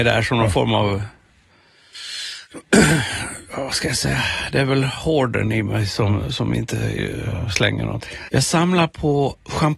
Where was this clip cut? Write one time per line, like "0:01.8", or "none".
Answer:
0:08.3